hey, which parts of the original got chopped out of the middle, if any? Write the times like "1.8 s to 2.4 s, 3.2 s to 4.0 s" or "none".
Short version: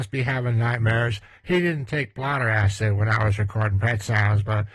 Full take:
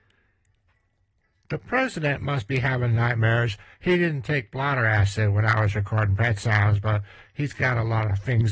none